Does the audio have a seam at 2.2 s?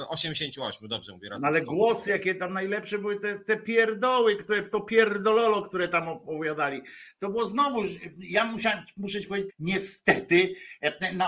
no; 1 cut; at 9.5 s

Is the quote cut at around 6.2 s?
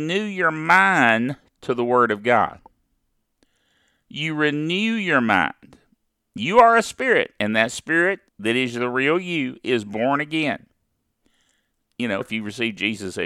no; 2 cuts; at 8.3 s, 12.2 s

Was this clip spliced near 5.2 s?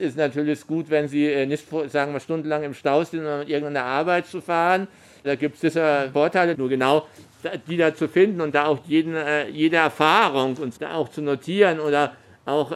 no; 2 cuts; at 6.5 s, 10.8 s

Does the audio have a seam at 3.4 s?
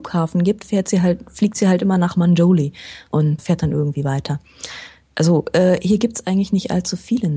yes; 1 cut; at 3.4 s

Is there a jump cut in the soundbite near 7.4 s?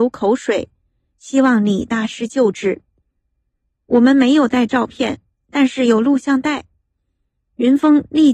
no; 2 cuts; at 1.1 s, 3.2 s

